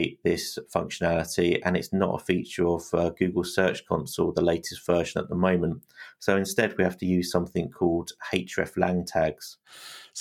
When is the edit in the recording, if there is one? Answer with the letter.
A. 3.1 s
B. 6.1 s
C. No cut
C